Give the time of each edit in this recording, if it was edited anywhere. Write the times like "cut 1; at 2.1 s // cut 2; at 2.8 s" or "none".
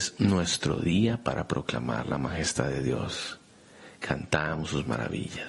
none